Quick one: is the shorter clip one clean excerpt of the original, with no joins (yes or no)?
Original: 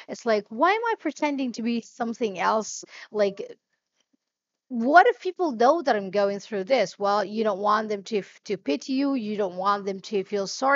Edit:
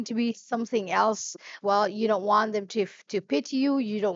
no